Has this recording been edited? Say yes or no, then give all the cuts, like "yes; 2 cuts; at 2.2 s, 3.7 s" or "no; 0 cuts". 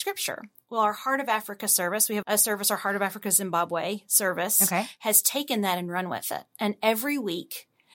yes; 1 cut; at 2.2 s